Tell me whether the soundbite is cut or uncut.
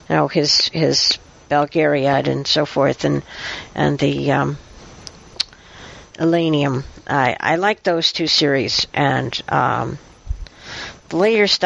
uncut